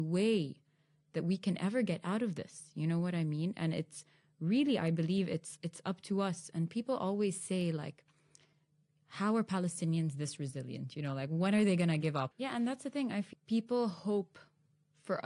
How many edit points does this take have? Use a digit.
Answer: 2